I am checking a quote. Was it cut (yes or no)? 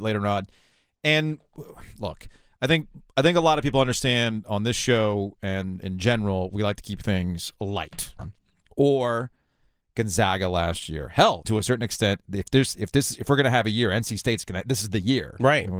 yes